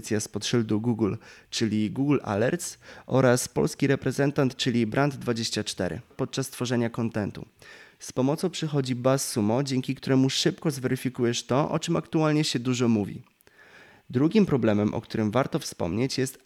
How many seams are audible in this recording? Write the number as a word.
one